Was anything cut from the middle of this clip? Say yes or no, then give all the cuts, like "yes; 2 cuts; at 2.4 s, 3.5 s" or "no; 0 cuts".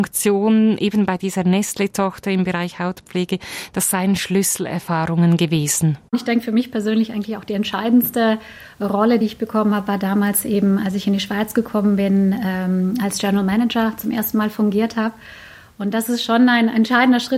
no; 0 cuts